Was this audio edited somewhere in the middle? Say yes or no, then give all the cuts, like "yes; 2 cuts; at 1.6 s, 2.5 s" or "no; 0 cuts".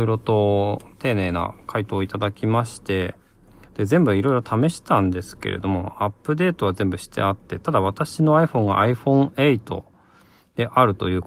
no; 0 cuts